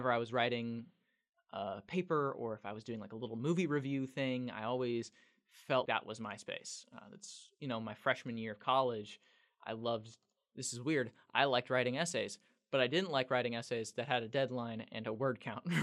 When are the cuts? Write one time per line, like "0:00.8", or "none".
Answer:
0:05.9